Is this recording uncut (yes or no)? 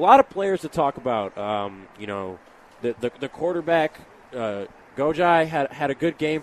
yes